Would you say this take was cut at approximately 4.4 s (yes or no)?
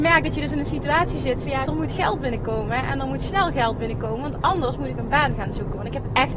no